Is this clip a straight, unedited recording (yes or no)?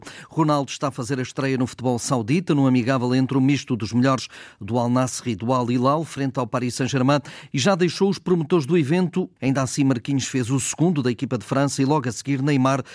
no